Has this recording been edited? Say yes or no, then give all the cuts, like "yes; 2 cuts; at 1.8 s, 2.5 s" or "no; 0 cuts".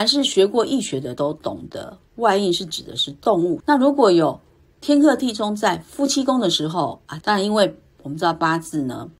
yes; 2 cuts; at 3.6 s, 7.2 s